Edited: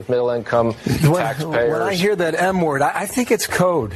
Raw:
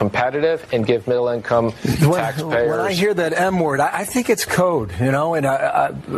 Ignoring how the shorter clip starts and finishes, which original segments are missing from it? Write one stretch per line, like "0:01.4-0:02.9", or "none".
none